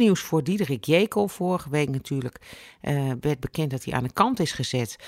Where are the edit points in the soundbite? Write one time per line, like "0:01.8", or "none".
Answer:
none